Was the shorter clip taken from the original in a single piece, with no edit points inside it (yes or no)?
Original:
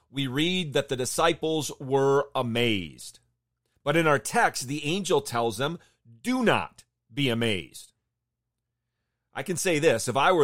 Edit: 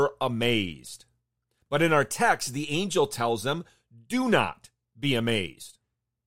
yes